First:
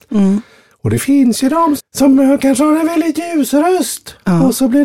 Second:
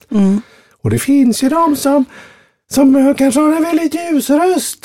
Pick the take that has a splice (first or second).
first